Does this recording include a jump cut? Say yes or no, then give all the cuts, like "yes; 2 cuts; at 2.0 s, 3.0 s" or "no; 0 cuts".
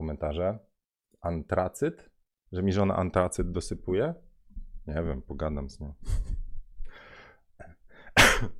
no; 0 cuts